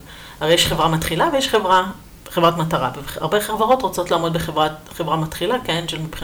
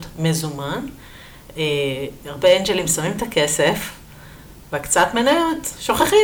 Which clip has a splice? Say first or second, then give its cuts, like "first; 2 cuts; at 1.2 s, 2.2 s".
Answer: second; 1 cut; at 2.2 s